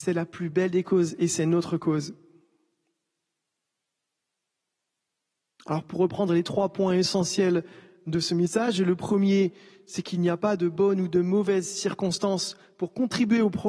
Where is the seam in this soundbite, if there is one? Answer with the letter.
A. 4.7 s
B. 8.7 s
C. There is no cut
C